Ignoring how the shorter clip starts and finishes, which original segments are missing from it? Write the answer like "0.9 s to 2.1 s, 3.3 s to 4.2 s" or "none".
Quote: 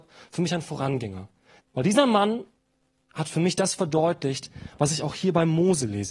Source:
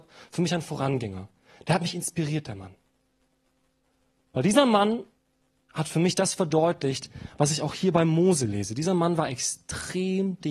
1.6 s to 4.2 s